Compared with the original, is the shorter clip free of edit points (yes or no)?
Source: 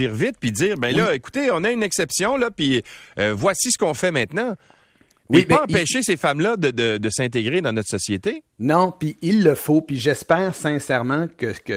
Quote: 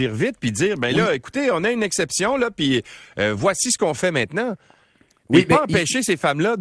yes